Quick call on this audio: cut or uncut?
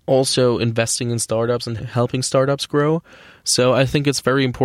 cut